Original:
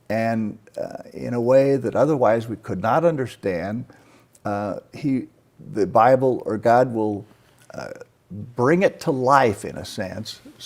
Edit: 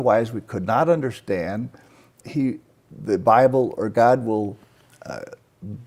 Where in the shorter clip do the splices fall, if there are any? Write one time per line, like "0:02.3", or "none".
0:02.2